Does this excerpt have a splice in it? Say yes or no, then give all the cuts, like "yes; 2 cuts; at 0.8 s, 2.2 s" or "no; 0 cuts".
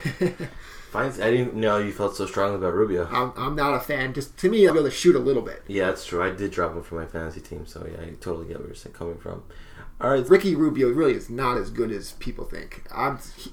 yes; 2 cuts; at 4.7 s, 10.3 s